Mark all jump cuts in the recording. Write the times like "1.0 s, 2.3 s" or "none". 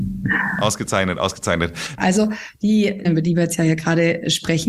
2.0 s, 3.0 s